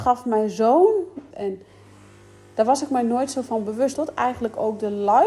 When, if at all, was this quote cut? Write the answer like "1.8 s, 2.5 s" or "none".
1.3 s, 3.9 s

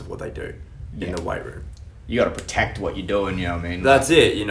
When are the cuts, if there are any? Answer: none

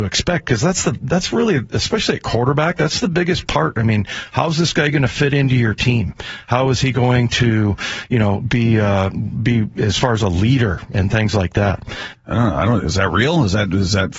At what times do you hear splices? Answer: 12.1 s

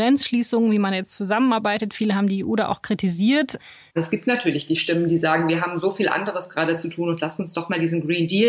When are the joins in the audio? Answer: 3.9 s

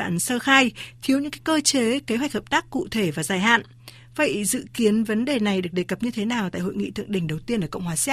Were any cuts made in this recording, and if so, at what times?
none

